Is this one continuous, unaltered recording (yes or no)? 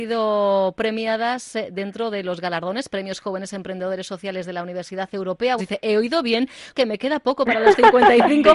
no